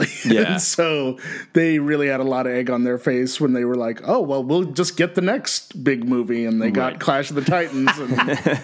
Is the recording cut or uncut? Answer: uncut